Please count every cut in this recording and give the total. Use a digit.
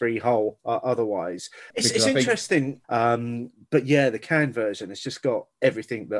2